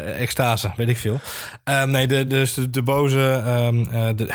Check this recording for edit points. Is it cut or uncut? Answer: uncut